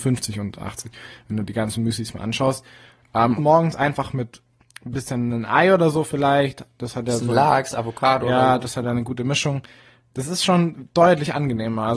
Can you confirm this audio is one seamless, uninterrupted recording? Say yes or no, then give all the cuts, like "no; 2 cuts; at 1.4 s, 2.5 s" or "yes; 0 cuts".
no; 1 cut; at 3.4 s